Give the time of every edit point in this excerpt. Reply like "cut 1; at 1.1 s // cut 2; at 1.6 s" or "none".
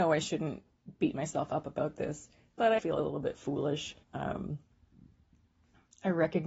cut 1; at 2.8 s // cut 2; at 4.0 s